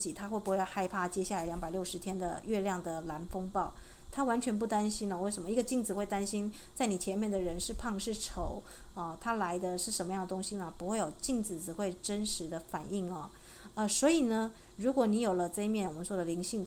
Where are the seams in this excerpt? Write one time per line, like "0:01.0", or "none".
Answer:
none